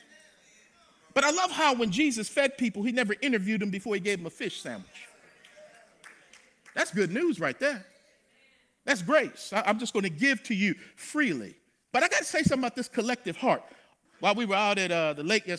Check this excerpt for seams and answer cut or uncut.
cut